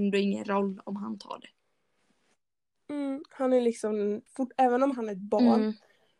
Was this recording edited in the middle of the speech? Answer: yes; 1 cut; at 4.3 s

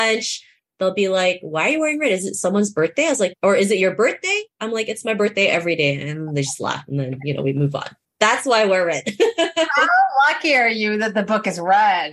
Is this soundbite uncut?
yes; 0 cuts

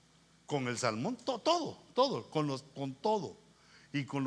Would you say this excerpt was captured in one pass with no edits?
yes; 0 cuts

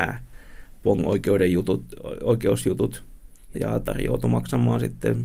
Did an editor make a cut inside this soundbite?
yes; 1 cut; at 3.5 s

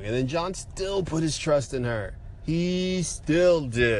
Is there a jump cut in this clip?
no; 0 cuts

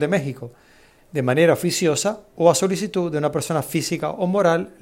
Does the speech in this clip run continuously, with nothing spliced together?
no; 1 cut; at 1.0 s

